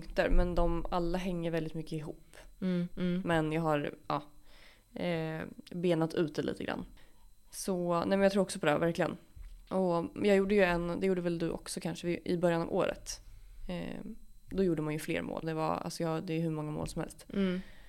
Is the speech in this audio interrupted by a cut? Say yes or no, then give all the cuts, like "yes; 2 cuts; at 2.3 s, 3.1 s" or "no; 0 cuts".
yes; 2 cuts; at 2.9 s, 15.4 s